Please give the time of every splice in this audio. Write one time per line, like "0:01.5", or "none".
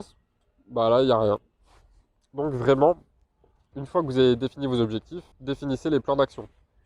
0:03.7
0:05.3